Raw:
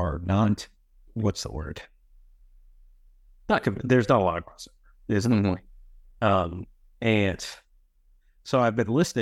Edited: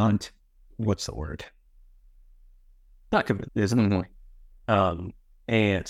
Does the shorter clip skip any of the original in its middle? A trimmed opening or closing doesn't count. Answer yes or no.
yes